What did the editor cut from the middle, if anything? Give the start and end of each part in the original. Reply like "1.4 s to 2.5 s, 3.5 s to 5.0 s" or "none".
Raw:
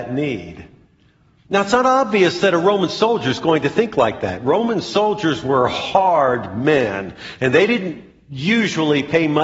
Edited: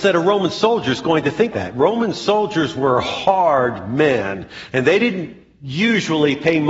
3.9 s to 4.2 s